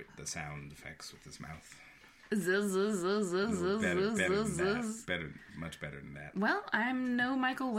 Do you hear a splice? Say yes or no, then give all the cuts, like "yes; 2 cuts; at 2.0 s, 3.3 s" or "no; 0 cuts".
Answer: no; 0 cuts